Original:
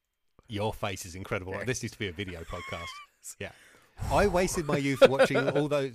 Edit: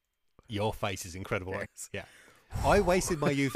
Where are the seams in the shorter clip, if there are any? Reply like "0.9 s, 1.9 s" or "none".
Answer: 1.6 s